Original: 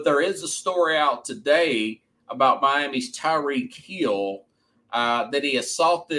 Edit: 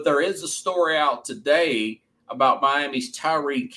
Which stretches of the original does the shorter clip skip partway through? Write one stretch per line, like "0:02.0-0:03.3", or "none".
none